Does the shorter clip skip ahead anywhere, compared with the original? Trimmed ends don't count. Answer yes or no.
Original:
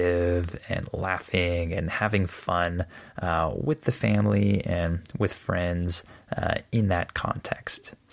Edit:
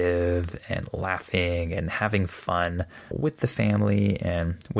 yes